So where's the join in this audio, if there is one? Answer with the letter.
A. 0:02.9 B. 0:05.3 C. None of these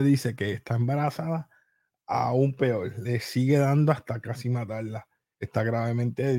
B